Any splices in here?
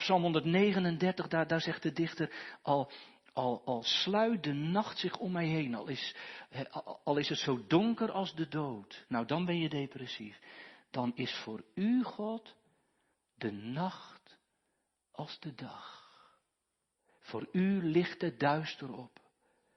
no; 0 cuts

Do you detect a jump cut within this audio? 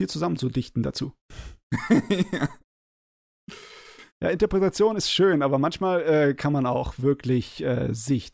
no; 0 cuts

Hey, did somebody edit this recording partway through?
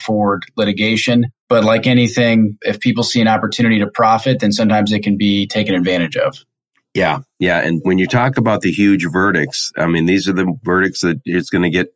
no; 0 cuts

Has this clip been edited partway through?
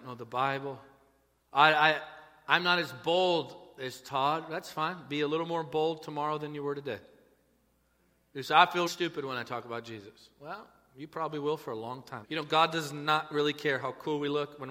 yes; 3 cuts; at 1.4 s, 8.9 s, 12.2 s

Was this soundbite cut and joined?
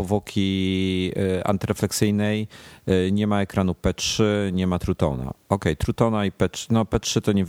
no; 0 cuts

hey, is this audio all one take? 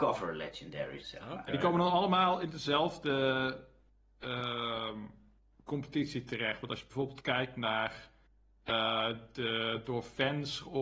no; 1 cut; at 1.0 s

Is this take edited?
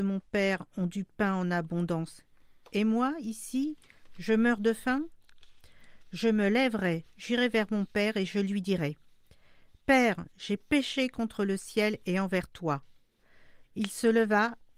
yes; 1 cut; at 13.6 s

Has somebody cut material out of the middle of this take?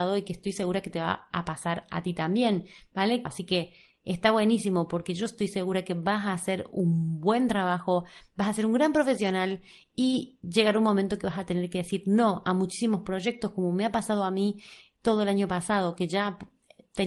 yes; 1 cut; at 3.3 s

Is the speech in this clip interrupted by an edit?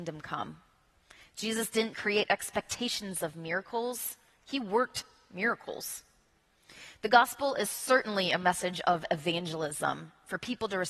yes; 1 cut; at 1.9 s

